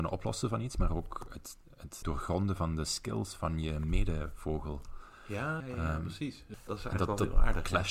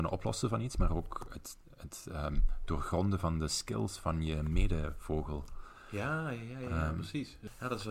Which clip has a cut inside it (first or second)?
first